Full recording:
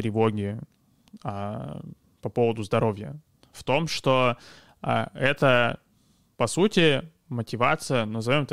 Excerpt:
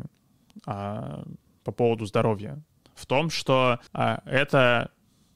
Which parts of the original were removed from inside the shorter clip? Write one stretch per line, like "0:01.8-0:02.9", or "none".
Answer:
0:04.4-0:04.8